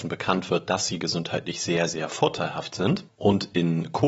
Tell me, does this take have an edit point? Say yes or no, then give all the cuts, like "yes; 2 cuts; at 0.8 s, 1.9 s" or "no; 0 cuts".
no; 0 cuts